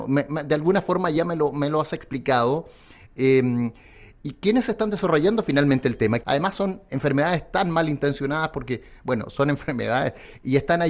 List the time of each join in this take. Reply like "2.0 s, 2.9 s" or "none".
6.2 s